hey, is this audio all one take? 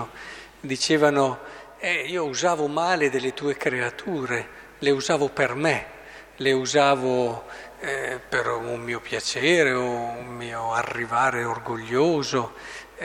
yes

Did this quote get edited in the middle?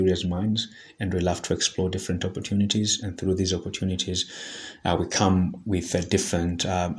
no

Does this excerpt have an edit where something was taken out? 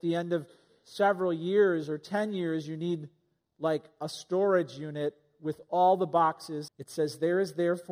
yes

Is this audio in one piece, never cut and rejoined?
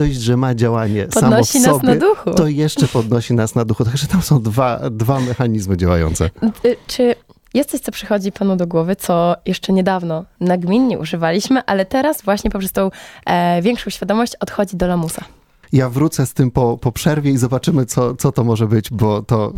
no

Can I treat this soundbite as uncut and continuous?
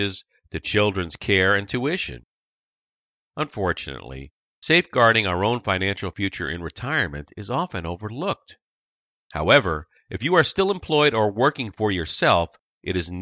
yes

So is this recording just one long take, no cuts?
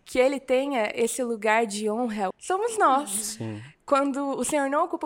no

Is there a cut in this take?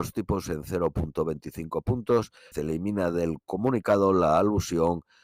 yes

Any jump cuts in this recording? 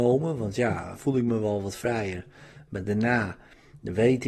yes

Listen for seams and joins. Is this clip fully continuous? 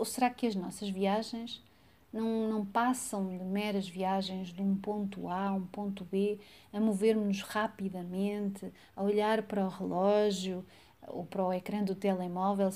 yes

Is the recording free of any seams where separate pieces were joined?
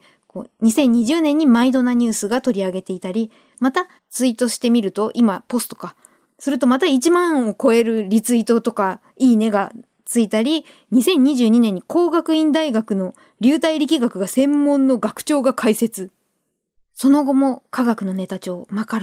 no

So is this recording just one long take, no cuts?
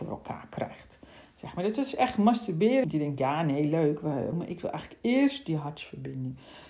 no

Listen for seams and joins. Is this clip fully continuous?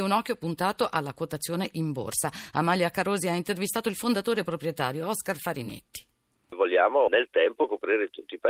yes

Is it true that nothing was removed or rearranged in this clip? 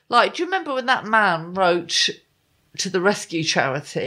yes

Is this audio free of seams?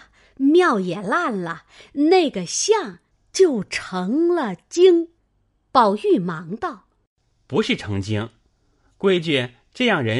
yes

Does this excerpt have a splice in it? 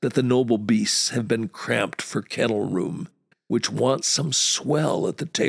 yes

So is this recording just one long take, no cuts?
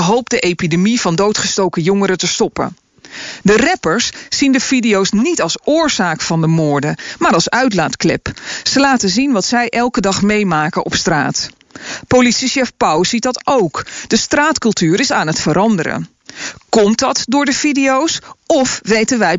yes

